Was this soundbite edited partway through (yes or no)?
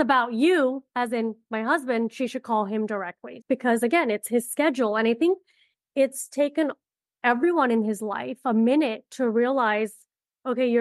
yes